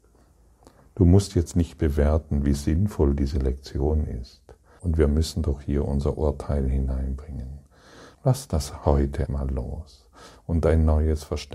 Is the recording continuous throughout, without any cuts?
no; 3 cuts; at 4.8 s, 8.1 s, 9.3 s

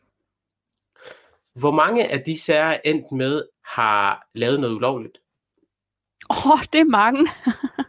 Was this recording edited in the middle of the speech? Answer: yes; 2 cuts; at 1.5 s, 3.5 s

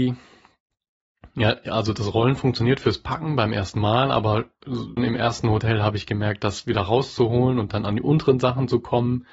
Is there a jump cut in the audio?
yes; 1 cut; at 5.0 s

